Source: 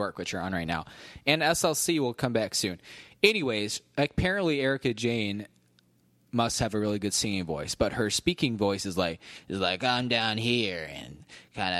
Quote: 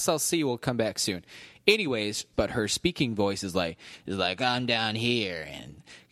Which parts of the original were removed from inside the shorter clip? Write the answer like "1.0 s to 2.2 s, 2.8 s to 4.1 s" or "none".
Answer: 3.9 s to 7.8 s